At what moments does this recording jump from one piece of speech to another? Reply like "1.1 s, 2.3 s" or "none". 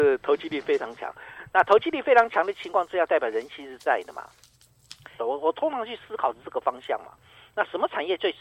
5.2 s